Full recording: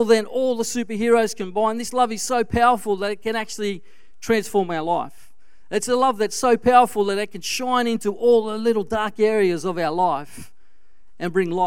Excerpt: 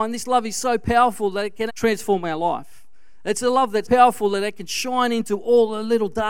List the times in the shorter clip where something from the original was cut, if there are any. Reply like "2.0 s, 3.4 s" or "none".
1.7 s, 3.8 s